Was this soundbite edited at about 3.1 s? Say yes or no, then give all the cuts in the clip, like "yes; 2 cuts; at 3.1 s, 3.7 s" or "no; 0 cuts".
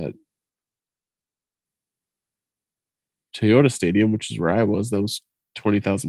no; 0 cuts